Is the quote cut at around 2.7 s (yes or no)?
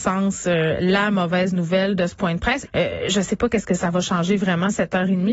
yes